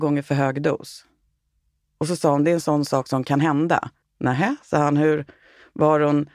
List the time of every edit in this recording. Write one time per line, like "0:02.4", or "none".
0:04.0